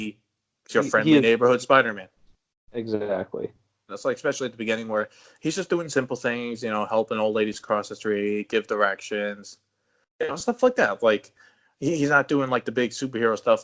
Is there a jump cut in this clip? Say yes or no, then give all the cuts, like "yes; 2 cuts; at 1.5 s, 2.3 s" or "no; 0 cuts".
yes; 1 cut; at 3.9 s